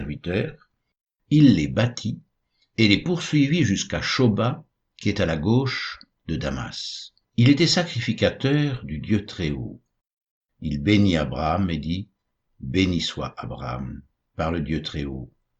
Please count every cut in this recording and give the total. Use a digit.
1